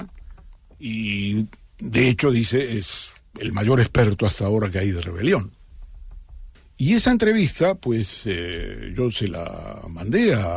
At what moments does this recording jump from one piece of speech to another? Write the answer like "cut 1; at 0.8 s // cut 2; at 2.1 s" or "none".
cut 1; at 6.5 s